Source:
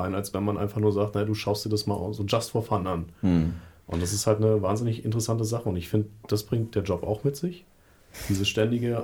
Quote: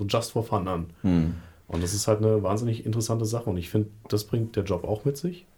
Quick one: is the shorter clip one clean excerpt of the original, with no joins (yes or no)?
yes